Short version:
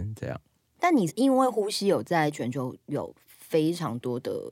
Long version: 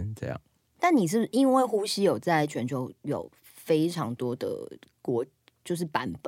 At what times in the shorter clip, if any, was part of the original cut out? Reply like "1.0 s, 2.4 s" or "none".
1.1 s